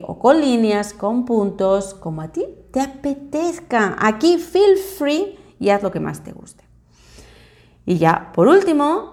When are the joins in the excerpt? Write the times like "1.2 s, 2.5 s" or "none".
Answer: none